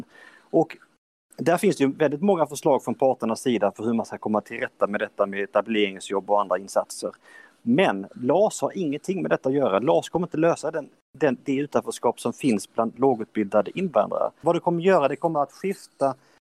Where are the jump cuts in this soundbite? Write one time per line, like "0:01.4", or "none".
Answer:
0:14.4